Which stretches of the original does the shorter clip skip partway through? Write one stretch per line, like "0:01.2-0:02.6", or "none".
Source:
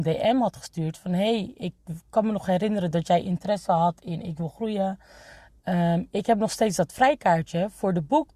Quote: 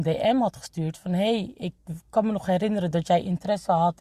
none